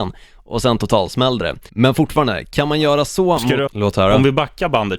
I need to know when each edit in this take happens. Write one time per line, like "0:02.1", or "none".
0:01.7
0:03.7

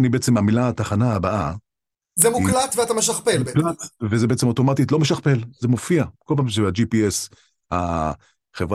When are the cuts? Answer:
none

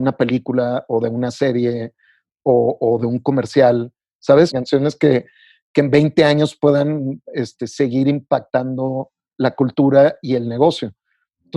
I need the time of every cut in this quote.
0:04.5

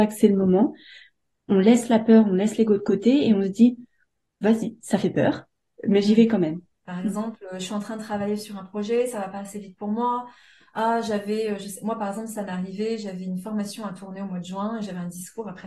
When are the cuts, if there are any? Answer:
0:06.8

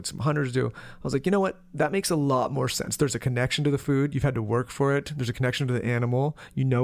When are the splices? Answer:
none

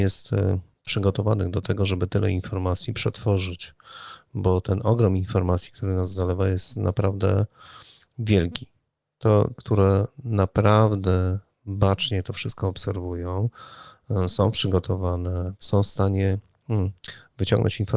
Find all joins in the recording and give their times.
0:09.5
0:15.6

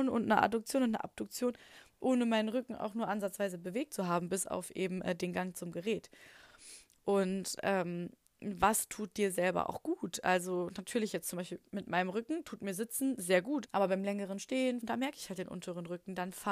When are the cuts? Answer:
0:13.6
0:14.8

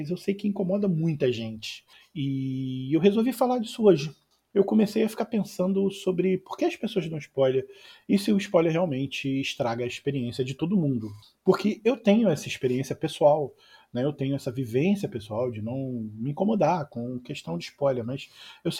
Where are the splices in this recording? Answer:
none

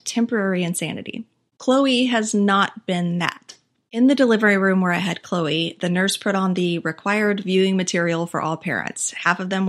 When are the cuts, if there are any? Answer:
0:01.5

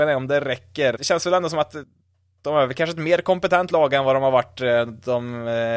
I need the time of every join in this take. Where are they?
0:01.0

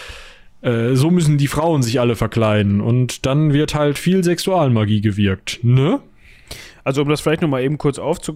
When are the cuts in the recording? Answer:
none

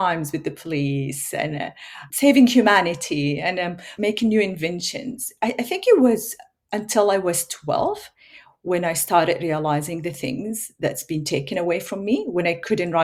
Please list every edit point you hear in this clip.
none

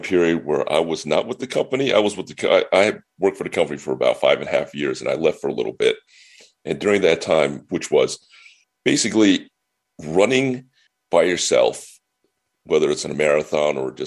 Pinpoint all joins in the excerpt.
0:07.7

